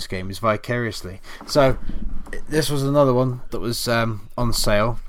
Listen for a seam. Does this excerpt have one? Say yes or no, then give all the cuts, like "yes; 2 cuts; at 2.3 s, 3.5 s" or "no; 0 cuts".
no; 0 cuts